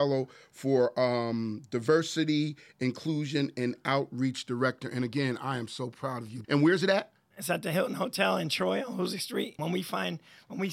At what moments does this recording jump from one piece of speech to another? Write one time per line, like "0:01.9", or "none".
0:06.4
0:09.6